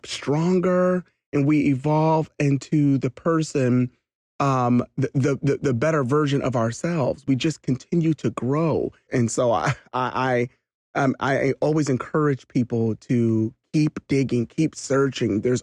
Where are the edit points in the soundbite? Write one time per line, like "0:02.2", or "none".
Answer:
0:09.1